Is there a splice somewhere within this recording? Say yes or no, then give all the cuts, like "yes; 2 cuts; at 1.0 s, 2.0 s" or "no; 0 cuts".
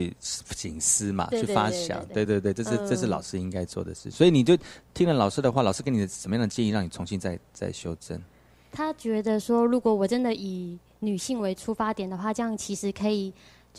no; 0 cuts